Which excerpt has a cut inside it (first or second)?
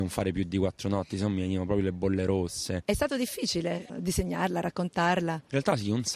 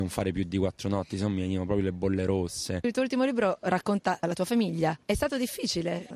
first